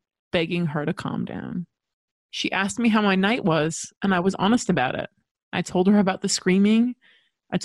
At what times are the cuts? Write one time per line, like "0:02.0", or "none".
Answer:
0:02.1